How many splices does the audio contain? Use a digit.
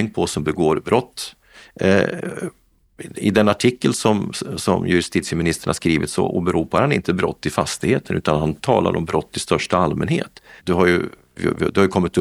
1